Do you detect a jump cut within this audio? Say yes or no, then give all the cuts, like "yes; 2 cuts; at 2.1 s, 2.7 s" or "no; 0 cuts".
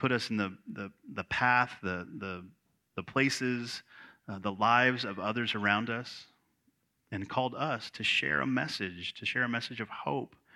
no; 0 cuts